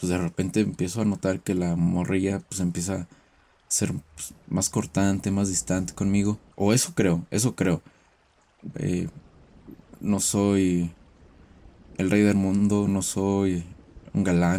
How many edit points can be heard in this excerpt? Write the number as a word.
two